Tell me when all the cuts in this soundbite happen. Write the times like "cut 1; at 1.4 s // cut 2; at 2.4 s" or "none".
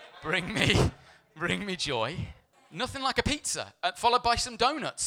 cut 1; at 2.5 s